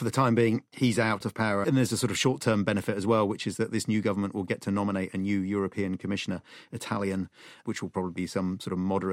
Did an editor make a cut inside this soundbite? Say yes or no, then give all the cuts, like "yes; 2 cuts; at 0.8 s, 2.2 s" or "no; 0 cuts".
yes; 1 cut; at 1.6 s